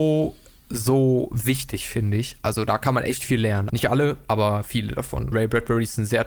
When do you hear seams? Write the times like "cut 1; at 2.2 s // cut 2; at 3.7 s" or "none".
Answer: cut 1; at 3.7 s // cut 2; at 5.3 s